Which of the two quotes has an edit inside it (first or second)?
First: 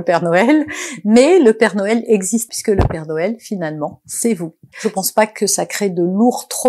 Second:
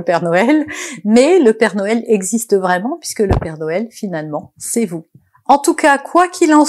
first